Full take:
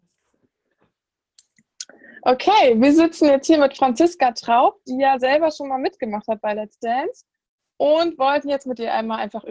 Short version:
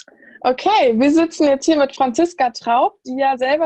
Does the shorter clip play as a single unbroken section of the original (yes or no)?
yes